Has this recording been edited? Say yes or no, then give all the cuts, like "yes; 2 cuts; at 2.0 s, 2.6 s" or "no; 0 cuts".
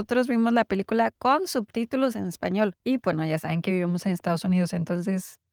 no; 0 cuts